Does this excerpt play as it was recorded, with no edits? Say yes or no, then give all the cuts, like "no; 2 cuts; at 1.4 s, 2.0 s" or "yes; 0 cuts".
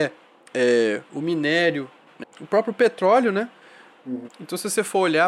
no; 2 cuts; at 2.2 s, 4.3 s